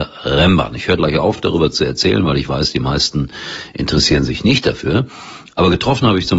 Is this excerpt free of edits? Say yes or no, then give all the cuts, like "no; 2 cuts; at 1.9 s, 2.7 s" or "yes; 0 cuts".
yes; 0 cuts